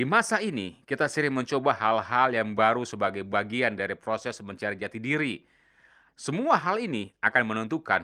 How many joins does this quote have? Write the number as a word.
one